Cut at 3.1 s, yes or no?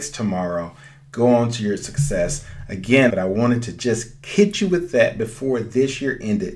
yes